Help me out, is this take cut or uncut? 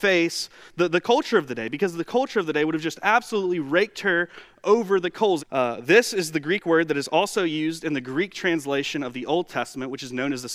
cut